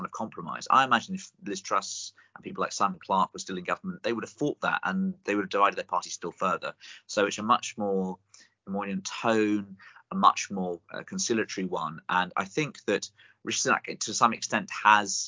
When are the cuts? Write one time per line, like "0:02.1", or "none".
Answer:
none